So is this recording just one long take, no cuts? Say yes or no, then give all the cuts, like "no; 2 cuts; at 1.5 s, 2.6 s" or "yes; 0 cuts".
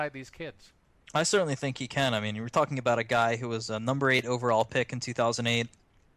yes; 0 cuts